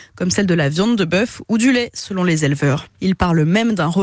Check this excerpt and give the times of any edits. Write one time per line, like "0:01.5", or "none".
0:02.9